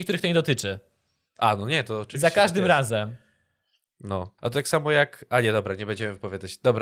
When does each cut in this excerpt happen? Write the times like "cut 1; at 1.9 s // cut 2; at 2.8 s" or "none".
cut 1; at 4.4 s